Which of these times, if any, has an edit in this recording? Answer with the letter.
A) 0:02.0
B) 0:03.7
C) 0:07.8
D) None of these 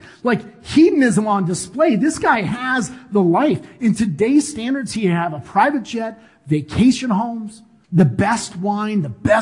C